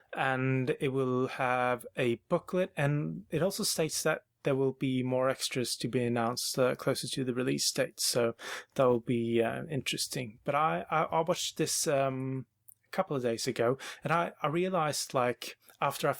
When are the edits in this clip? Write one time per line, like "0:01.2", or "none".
none